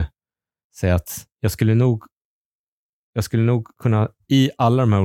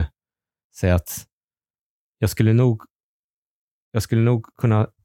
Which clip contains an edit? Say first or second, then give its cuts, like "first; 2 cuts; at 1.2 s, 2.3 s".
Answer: first; 1 cut; at 1.3 s